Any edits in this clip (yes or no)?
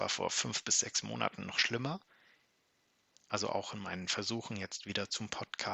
yes